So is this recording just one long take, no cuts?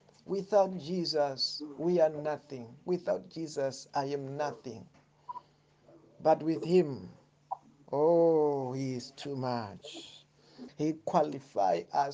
yes; 0 cuts

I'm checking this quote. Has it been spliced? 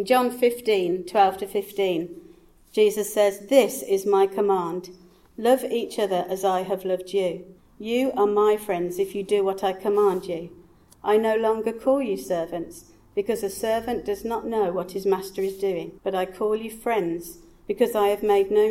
yes; 2 cuts; at 7.6 s, 16.0 s

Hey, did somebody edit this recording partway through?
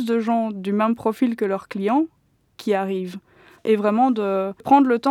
no; 0 cuts

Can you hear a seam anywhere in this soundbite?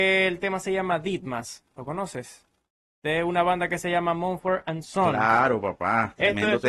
no; 0 cuts

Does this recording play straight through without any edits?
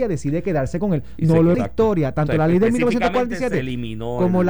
no; 1 cut; at 1.5 s

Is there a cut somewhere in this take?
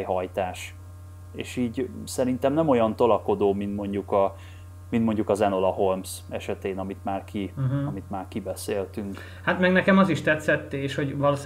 no; 0 cuts

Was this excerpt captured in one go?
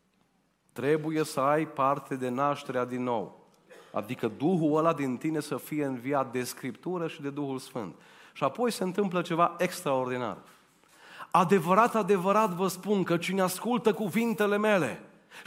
yes; 0 cuts

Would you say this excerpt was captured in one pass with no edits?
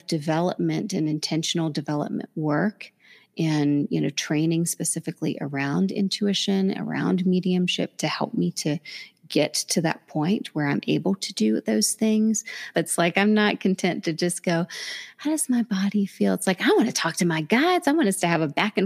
no; 1 cut; at 12.7 s

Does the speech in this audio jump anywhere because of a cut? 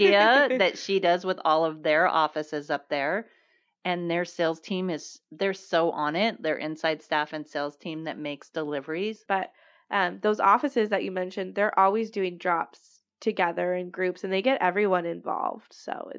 yes; 1 cut; at 9.3 s

